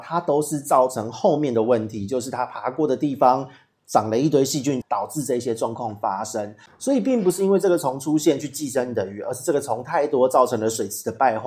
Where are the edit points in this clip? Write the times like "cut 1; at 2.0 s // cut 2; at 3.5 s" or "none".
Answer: cut 1; at 4.8 s